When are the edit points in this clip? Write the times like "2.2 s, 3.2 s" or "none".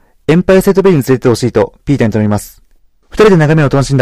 3.0 s